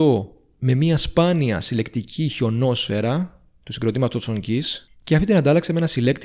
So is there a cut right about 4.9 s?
yes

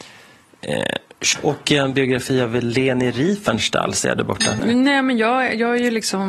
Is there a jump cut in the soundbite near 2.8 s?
no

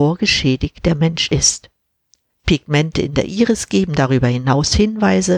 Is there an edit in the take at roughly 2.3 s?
yes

